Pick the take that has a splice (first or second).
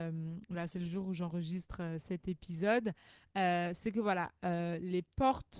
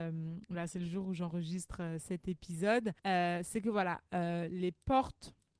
second